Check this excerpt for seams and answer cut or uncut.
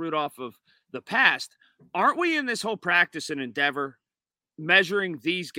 uncut